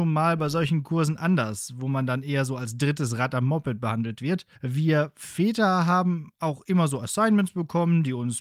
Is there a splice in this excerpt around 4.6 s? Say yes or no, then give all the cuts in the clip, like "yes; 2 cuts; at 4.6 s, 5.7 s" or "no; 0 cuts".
yes; 1 cut; at 4.6 s